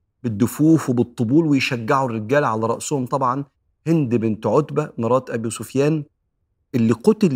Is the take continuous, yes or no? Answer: yes